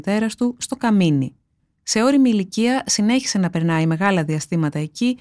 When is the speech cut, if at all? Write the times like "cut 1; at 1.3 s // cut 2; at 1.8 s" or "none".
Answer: none